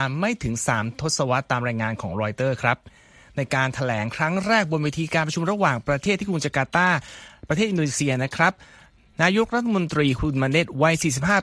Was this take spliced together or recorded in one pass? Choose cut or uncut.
uncut